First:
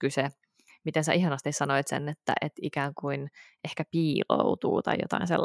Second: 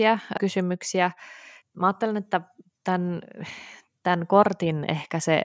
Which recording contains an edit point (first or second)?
second